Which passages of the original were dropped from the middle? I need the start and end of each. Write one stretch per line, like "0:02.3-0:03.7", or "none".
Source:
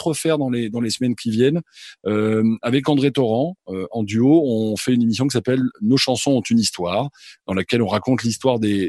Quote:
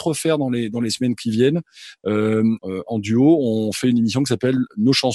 0:02.6-0:03.6